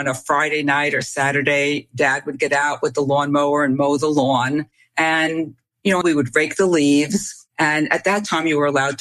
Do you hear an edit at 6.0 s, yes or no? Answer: yes